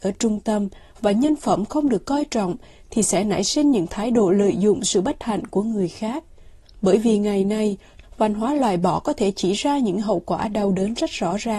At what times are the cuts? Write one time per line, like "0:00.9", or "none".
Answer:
0:06.6
0:08.0